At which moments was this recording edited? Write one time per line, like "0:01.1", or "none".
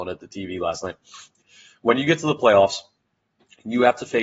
none